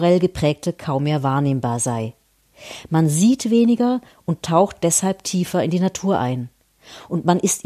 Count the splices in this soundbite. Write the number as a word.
zero